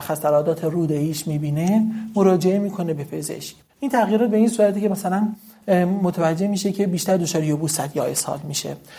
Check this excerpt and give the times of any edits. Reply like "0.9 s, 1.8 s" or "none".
3.7 s